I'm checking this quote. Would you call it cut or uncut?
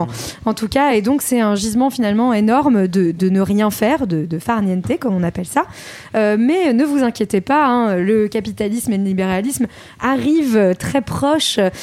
uncut